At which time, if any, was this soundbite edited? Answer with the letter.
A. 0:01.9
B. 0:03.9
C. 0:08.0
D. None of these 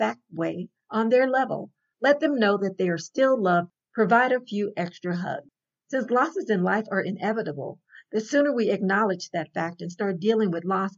A